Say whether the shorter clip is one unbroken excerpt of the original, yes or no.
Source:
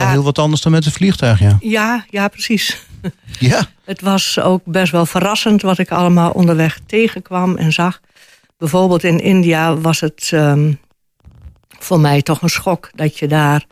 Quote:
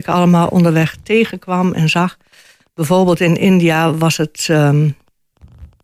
yes